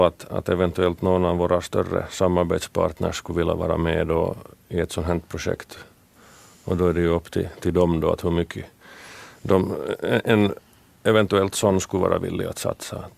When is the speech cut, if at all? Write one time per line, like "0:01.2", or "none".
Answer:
none

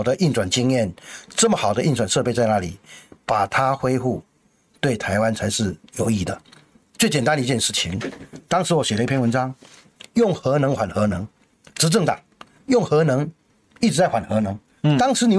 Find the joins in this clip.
none

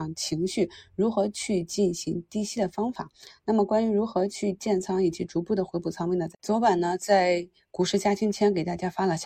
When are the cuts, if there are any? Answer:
0:06.3

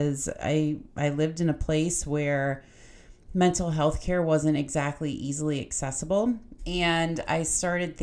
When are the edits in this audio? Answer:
0:06.6

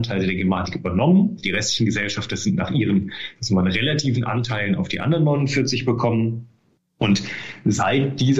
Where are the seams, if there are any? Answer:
none

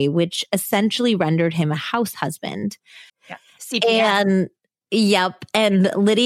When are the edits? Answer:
0:03.1

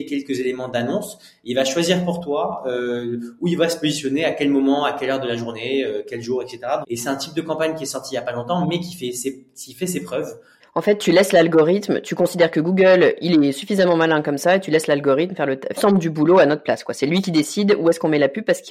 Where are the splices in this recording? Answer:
0:06.8
0:10.6
0:15.8

